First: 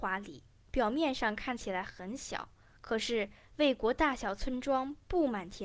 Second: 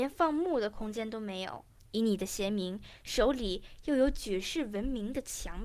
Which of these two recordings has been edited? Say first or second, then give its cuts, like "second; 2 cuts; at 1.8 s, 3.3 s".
second; 1 cut; at 1.8 s